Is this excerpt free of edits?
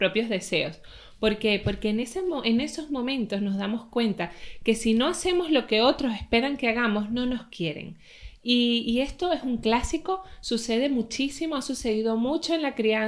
yes; 0 cuts

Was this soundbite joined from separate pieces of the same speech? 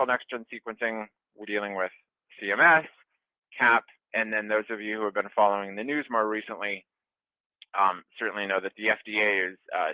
yes; 1 cut; at 1.4 s

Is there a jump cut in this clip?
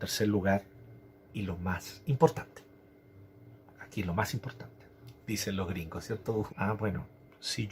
yes; 2 cuts; at 5.2 s, 6.5 s

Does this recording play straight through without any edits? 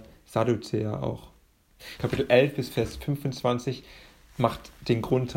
no; 1 cut; at 2.0 s

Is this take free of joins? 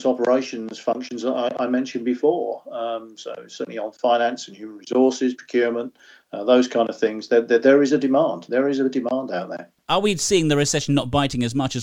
yes; 0 cuts

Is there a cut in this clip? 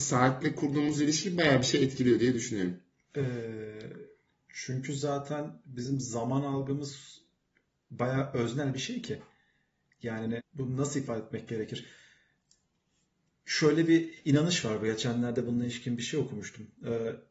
yes; 1 cut; at 10.4 s

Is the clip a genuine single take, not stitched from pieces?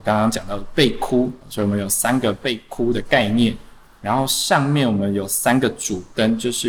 no; 1 cut; at 1.4 s

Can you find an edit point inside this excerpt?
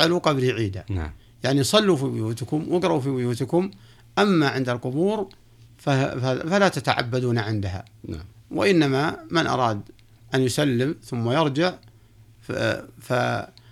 no; 0 cuts

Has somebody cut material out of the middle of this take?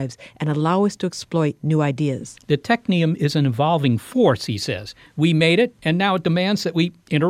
no; 0 cuts

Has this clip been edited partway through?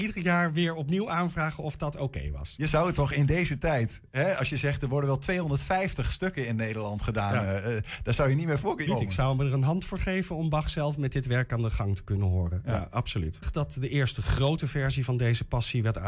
yes; 2 cuts; at 8.9 s, 13.4 s

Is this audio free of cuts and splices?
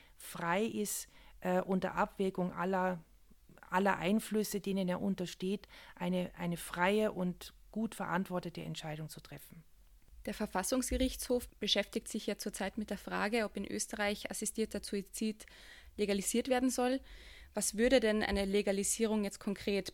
yes; 0 cuts

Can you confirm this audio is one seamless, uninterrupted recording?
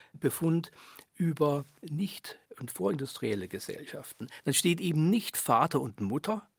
yes; 0 cuts

